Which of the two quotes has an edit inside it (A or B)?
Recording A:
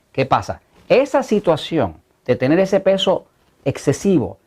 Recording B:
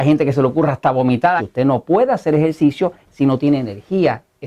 B